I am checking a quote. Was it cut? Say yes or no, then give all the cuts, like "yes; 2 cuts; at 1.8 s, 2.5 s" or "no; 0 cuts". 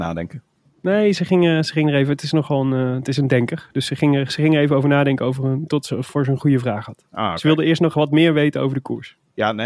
no; 0 cuts